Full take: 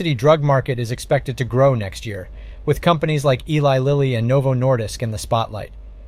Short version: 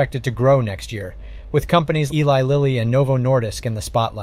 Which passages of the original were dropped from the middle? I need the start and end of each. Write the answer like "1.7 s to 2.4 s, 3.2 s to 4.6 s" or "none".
3.2 s to 3.4 s